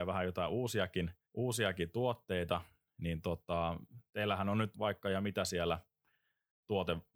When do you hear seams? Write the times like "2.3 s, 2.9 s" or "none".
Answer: 1.2 s, 4.7 s